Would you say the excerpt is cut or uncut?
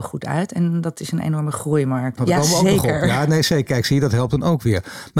cut